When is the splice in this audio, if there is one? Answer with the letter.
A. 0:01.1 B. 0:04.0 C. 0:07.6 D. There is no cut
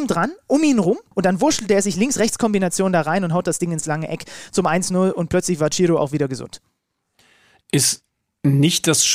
A